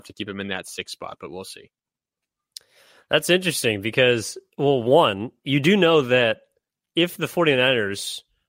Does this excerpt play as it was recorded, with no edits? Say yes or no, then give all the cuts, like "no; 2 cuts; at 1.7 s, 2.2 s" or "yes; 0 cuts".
yes; 0 cuts